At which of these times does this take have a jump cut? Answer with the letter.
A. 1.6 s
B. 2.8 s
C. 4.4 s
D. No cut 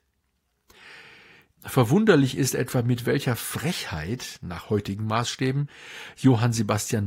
A